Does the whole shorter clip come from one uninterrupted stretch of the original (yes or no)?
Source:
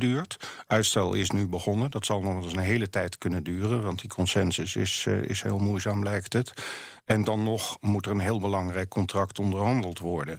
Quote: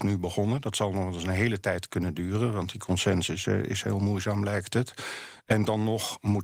no